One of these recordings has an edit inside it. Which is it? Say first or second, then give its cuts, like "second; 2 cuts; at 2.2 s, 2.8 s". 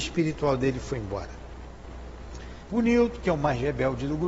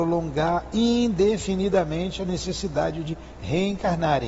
first; 1 cut; at 2.7 s